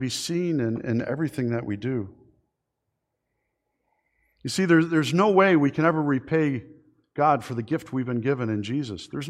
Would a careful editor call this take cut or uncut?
uncut